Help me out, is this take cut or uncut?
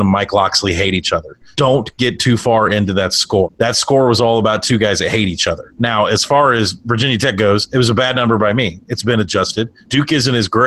uncut